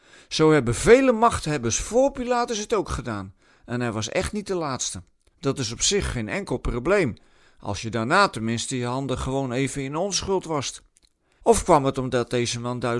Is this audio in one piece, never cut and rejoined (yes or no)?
no